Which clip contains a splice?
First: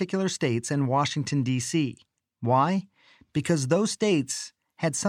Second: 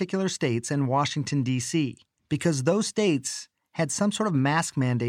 second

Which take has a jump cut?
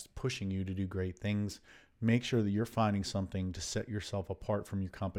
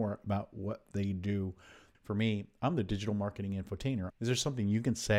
second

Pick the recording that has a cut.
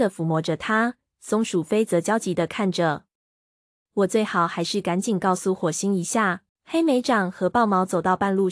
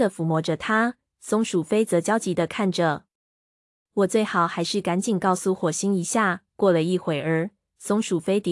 first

